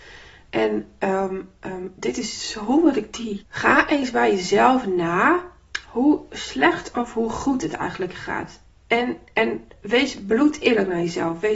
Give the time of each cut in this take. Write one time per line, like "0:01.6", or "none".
0:03.4

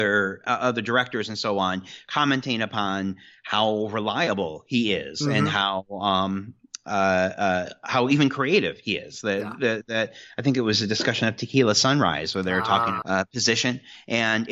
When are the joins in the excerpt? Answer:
0:13.0

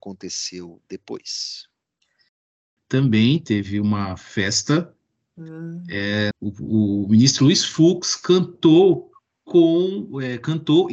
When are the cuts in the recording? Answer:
0:02.8
0:06.3

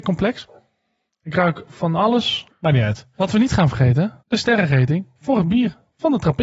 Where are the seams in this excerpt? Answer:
0:02.5
0:04.2

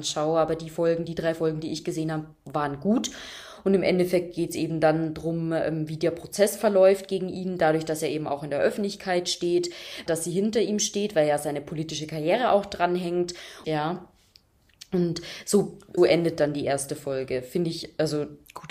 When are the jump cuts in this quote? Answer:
0:10.1
0:13.6
0:16.0

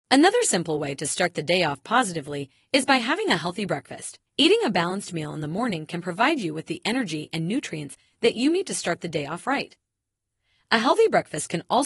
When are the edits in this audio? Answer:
0:04.3

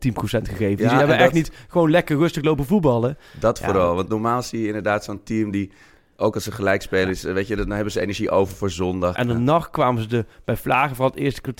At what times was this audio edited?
0:09.1

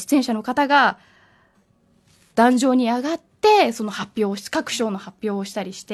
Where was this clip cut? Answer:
none

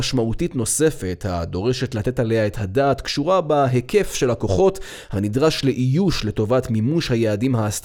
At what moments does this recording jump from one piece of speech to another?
none

